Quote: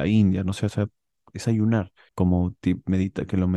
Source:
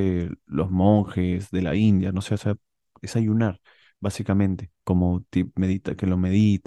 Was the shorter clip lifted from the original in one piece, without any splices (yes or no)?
no